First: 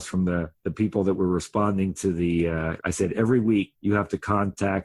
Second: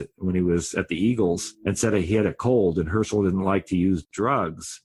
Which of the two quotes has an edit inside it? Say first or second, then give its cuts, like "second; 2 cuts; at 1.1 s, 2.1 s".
first; 1 cut; at 2.8 s